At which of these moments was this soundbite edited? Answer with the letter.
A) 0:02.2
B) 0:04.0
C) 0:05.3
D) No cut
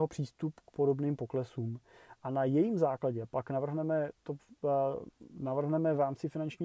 D